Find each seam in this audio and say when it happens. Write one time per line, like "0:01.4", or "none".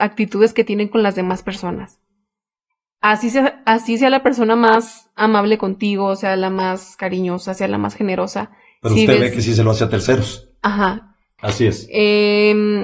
0:11.4